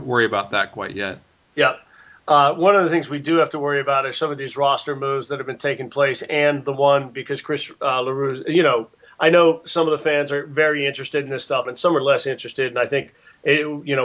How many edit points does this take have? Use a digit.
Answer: 1